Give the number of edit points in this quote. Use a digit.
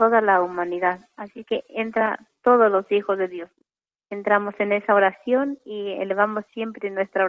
0